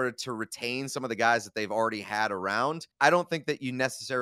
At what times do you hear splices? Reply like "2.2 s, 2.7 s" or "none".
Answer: 2.9 s